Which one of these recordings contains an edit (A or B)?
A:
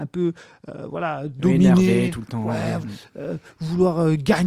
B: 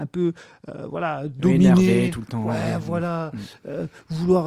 A